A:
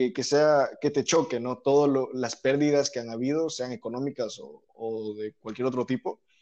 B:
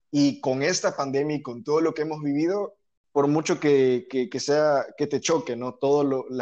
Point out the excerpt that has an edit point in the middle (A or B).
A